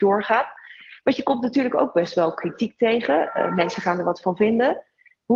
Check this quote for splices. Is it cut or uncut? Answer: uncut